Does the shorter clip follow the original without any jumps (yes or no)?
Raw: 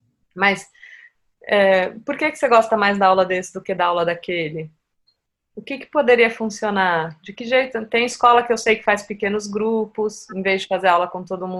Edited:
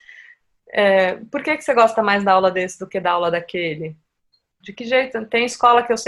no